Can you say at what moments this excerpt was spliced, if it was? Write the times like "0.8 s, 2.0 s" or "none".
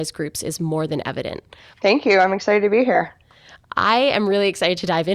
1.7 s